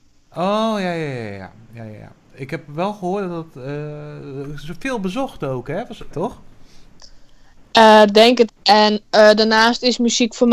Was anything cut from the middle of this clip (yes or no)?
yes